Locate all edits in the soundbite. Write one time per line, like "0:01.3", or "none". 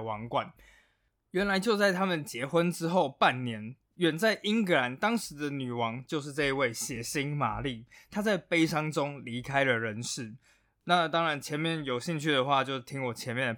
none